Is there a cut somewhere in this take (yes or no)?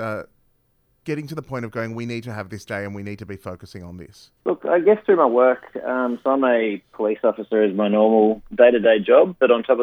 yes